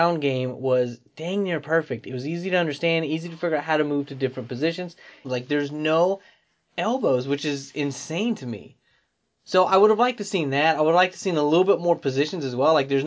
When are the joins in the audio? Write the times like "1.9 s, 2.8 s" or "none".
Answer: 5.2 s

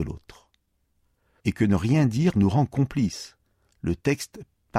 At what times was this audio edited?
1.4 s

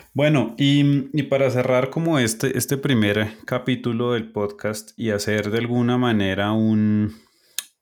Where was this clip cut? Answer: 5.0 s

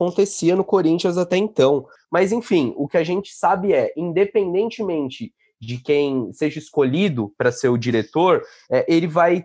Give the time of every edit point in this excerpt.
2.0 s

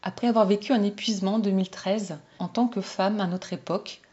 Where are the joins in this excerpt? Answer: 2.4 s

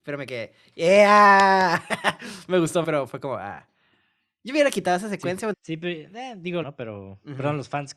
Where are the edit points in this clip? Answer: 2.8 s, 5.5 s, 6.6 s

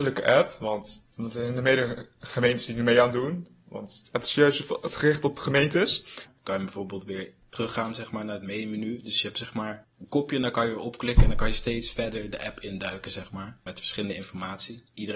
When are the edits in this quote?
6.3 s

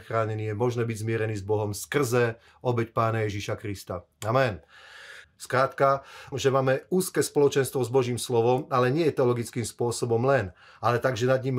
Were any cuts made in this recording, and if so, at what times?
5.2 s, 6.3 s

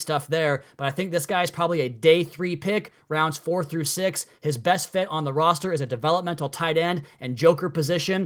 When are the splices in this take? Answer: none

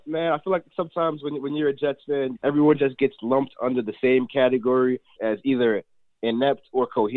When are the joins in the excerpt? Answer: 2.3 s, 5.2 s

